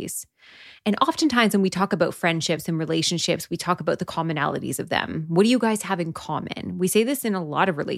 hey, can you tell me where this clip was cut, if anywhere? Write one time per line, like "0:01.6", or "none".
none